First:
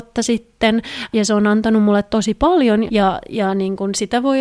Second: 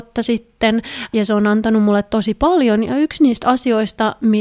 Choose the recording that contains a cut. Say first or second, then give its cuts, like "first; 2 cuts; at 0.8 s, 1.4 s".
first; 1 cut; at 2.9 s